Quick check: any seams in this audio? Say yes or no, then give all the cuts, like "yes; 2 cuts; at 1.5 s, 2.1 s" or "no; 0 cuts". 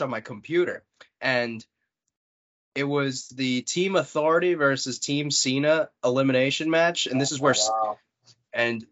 no; 0 cuts